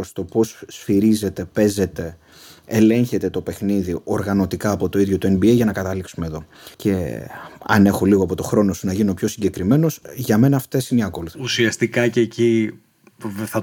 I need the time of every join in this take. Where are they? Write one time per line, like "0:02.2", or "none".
0:06.7
0:11.3

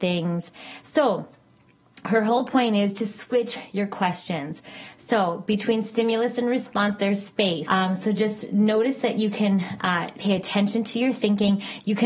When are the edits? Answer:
0:07.6
0:10.1

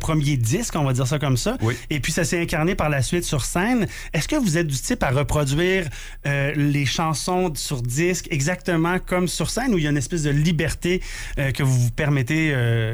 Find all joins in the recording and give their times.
none

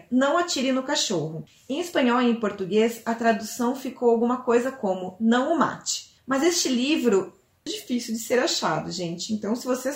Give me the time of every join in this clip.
0:07.7

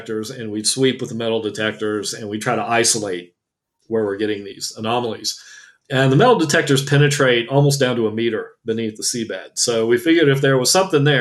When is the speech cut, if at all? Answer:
none

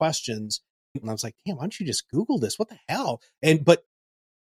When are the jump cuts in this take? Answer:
0:01.0

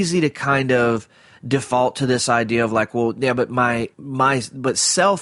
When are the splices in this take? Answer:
0:03.9

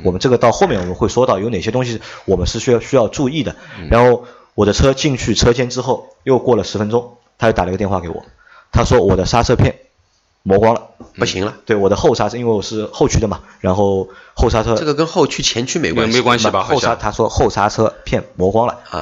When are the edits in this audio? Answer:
none

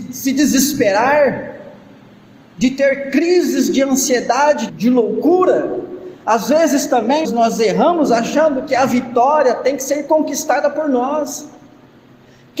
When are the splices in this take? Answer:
0:04.7
0:07.2

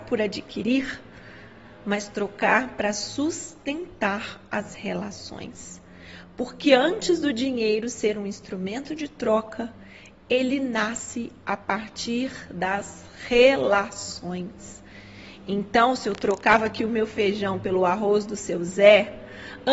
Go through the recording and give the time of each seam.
none

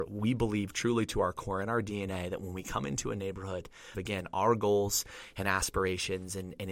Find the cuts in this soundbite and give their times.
0:03.9

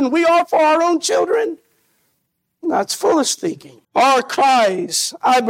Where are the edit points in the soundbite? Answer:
0:03.8

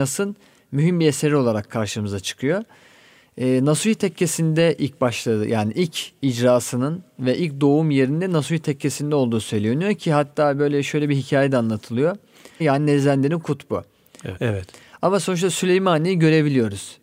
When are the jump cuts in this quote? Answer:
0:12.6
0:14.4

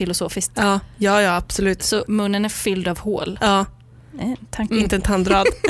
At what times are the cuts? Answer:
0:04.7

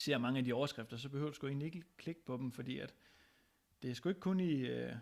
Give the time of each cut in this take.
none

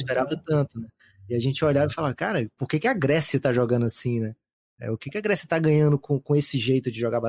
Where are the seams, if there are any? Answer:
none

